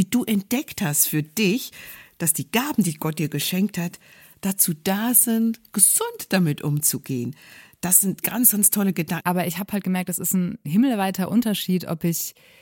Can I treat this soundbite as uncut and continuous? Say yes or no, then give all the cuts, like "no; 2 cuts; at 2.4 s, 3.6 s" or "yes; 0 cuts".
no; 2 cuts; at 4.3 s, 9.2 s